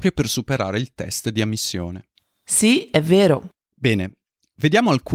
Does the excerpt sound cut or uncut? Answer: uncut